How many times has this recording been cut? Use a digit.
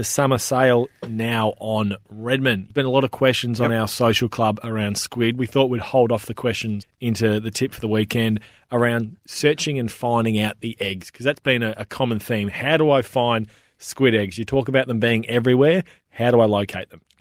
0